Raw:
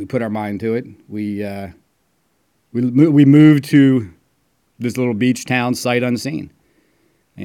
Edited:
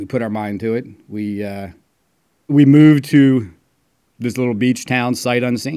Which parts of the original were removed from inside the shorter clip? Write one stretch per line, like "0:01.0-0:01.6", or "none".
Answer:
0:02.5-0:03.1